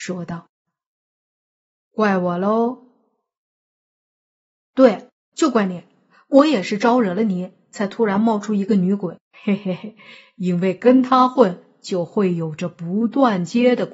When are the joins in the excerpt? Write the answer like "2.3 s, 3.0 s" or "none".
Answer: 9.3 s